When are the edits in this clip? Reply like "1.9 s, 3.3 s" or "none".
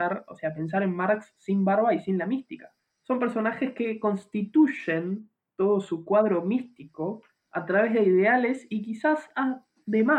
2.8 s